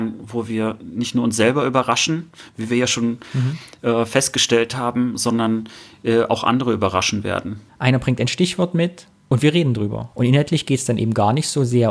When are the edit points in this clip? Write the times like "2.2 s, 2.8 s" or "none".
7.7 s, 10.1 s